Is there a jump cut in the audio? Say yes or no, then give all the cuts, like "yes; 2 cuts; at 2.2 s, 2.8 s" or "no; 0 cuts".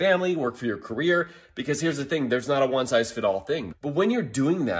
yes; 1 cut; at 3.7 s